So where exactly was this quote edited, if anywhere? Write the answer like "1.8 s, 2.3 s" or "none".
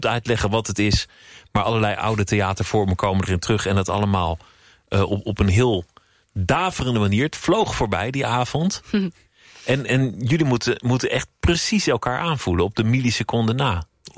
none